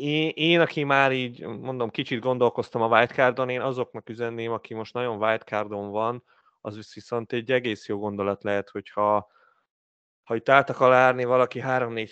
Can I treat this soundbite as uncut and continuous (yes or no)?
yes